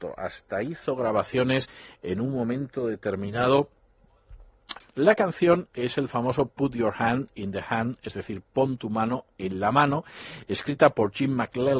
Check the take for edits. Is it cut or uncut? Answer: cut